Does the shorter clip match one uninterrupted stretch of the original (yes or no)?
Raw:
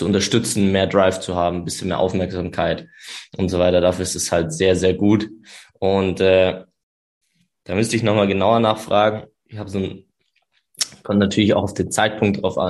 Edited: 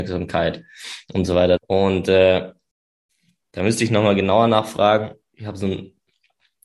no